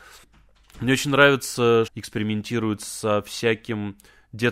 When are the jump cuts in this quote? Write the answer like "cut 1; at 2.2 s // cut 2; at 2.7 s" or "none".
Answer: cut 1; at 1.9 s